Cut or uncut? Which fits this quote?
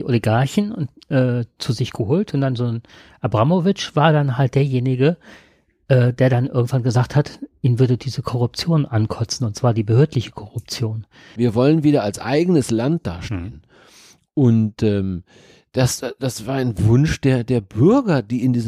cut